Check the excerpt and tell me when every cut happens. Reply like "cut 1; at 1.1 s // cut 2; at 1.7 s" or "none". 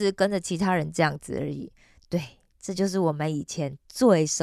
none